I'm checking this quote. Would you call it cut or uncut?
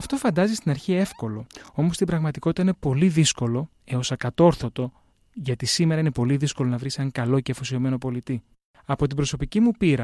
uncut